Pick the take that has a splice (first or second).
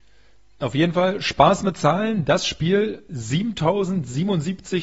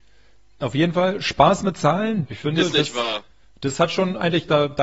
second